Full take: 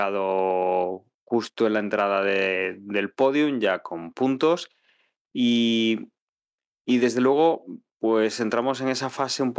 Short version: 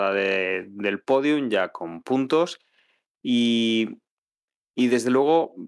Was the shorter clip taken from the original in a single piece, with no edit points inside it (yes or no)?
yes